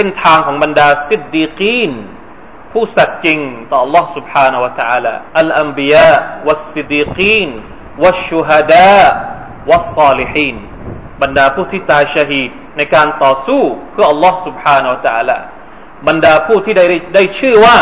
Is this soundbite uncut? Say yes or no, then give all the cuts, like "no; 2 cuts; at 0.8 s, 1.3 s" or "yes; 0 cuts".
no; 3 cuts; at 5.3 s, 6.9 s, 12.7 s